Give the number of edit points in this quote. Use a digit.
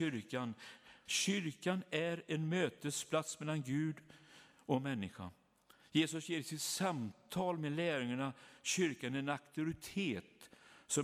1